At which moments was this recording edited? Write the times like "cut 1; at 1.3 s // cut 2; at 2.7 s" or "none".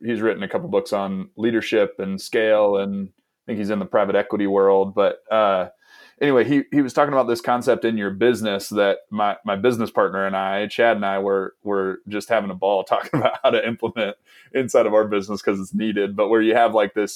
none